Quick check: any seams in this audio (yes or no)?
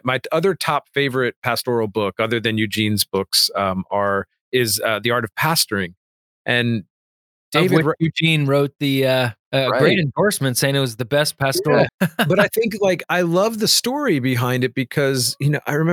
yes